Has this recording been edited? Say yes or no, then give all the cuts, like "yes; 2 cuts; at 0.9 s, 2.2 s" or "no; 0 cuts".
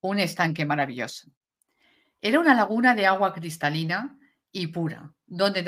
no; 0 cuts